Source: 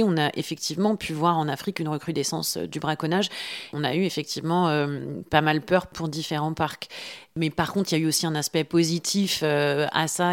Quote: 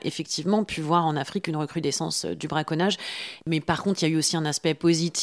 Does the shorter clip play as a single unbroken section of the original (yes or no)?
no